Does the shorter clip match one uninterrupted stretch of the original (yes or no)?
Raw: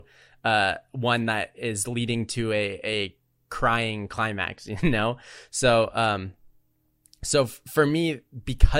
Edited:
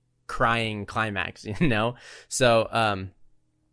yes